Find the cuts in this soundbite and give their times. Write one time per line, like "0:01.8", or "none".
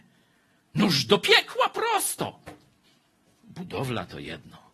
0:03.4